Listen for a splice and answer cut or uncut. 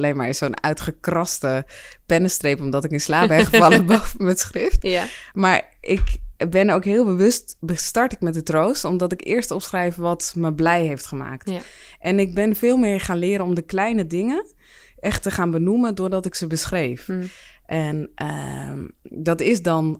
uncut